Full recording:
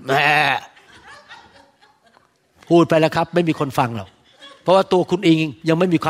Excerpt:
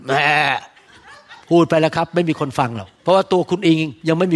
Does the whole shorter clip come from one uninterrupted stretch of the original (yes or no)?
no